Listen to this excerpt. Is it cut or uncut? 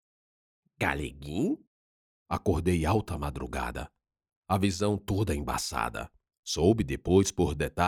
cut